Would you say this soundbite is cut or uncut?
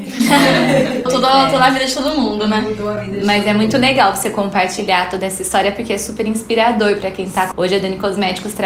cut